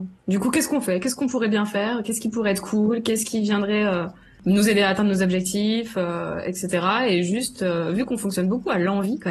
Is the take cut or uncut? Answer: uncut